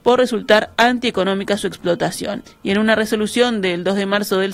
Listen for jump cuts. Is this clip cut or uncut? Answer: cut